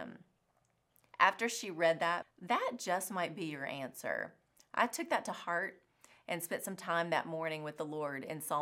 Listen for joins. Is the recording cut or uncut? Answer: cut